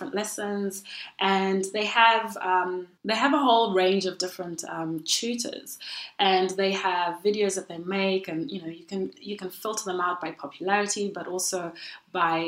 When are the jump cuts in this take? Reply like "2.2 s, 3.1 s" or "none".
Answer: 3.0 s